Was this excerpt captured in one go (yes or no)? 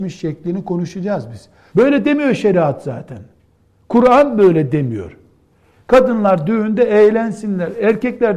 no